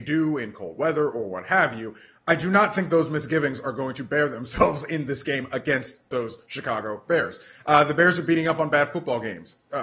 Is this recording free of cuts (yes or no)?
yes